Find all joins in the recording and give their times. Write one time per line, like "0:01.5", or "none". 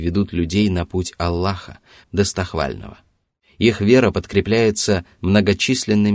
0:02.0